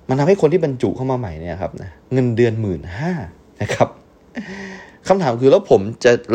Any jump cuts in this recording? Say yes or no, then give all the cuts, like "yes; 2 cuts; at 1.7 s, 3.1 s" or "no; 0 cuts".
yes; 1 cut; at 2.0 s